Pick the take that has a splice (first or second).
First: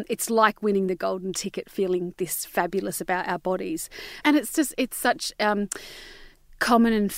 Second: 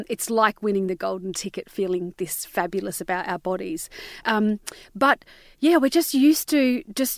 first